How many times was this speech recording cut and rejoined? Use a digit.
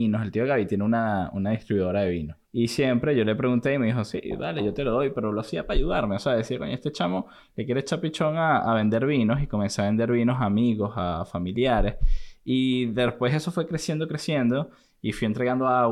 1